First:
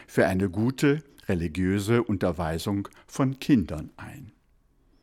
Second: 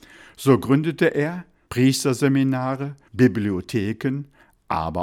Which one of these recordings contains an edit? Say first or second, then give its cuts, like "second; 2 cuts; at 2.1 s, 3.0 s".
second; 2 cuts; at 1.7 s, 3.1 s